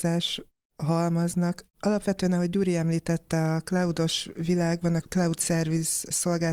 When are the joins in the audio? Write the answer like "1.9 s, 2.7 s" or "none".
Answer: 5.0 s